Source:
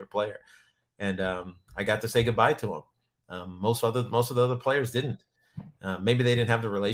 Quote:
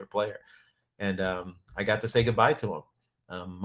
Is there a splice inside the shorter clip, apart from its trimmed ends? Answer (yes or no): no